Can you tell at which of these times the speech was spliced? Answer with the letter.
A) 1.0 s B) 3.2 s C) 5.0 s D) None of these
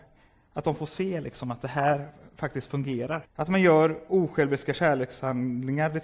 B